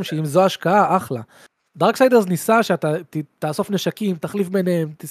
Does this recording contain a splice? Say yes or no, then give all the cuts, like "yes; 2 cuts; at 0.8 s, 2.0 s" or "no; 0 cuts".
no; 0 cuts